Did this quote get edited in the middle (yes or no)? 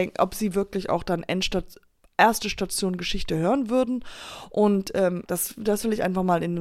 yes